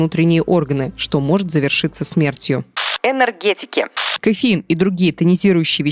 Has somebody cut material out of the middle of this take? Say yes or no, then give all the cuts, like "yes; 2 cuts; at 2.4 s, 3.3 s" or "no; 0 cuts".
no; 0 cuts